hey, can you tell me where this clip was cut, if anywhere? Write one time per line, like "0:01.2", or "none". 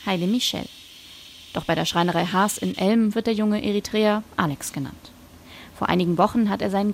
0:04.3